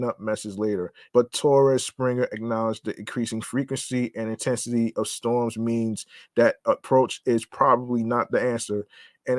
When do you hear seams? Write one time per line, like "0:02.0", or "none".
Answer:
0:01.1